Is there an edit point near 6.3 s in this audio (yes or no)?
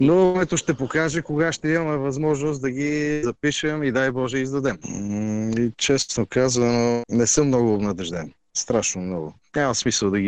no